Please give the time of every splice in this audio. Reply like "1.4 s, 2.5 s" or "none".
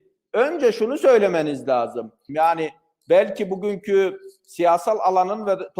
2.3 s